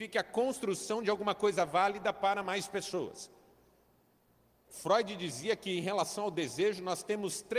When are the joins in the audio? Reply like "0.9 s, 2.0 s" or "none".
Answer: 4.7 s